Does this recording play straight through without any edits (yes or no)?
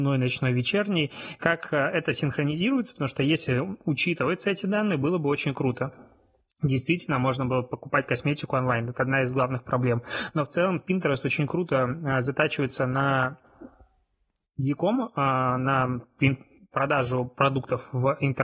yes